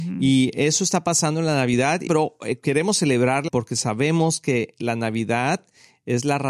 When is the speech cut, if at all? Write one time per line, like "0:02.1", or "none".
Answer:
0:02.1
0:03.5